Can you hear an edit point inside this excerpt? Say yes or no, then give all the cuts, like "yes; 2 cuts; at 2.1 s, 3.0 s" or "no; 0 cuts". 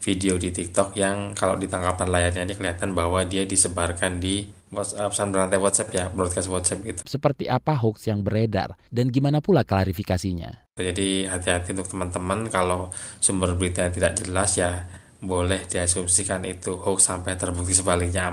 yes; 3 cuts; at 4.7 s, 7.0 s, 10.8 s